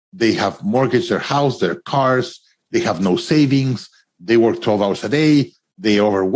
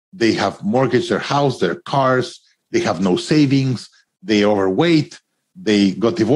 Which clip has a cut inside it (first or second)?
second